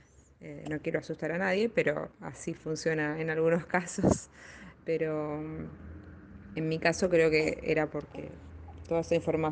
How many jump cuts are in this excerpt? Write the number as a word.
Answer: one